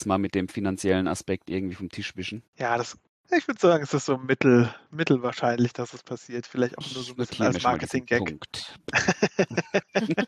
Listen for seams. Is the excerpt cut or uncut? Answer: cut